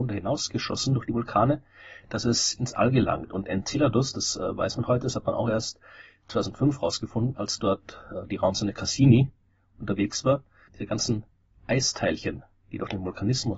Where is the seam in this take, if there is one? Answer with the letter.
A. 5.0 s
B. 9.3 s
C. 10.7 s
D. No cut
C